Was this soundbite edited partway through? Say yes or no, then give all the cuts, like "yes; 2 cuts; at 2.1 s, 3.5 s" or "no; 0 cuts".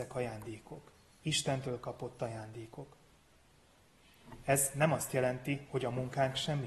no; 0 cuts